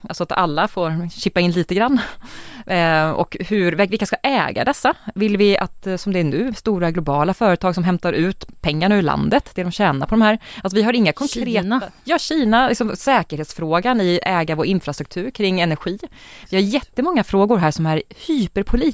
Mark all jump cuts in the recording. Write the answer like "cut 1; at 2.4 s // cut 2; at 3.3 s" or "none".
none